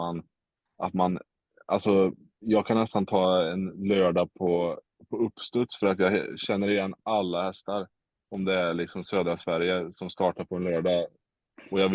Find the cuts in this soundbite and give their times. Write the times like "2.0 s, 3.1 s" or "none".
none